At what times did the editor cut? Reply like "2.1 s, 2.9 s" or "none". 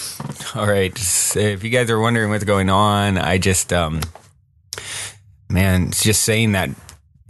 none

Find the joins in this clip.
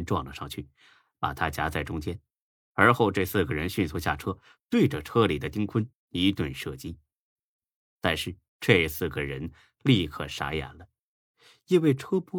4.6 s, 8.5 s

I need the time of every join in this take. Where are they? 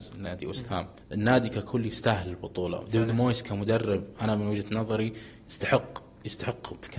1.0 s

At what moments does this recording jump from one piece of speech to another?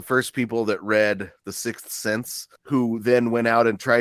2.6 s

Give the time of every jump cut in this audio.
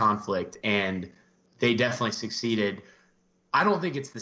none

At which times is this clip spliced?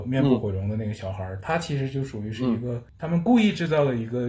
none

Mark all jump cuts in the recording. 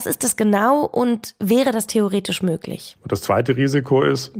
3.0 s

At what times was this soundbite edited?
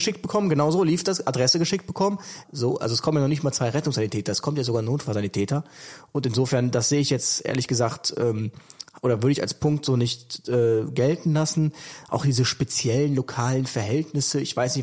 2.4 s

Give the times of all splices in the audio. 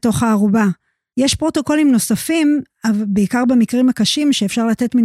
1.1 s

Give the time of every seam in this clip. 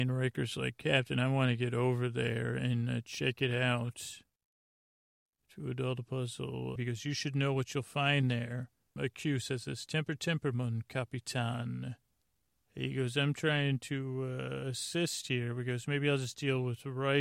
6.8 s, 9.0 s

